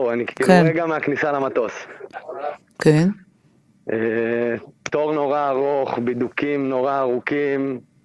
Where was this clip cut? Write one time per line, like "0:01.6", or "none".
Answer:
0:02.6